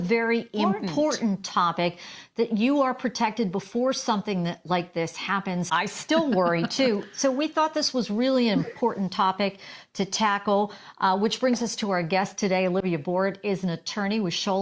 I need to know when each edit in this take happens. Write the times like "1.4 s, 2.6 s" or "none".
5.7 s